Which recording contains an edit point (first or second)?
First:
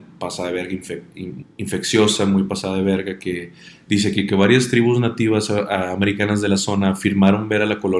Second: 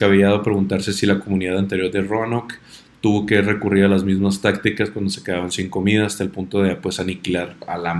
first